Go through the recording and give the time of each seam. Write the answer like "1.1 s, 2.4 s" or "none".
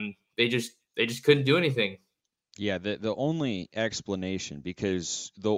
none